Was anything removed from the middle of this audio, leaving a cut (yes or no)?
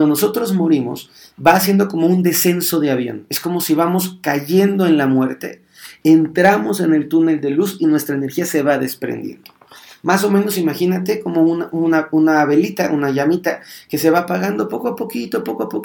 no